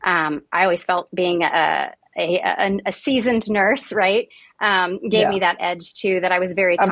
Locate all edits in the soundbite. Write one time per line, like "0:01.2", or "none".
0:02.1